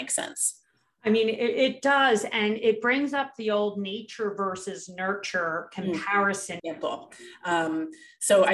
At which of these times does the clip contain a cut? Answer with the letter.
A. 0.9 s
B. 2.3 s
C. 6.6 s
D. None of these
C